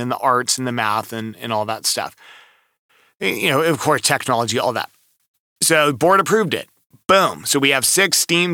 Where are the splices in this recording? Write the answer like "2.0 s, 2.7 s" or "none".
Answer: none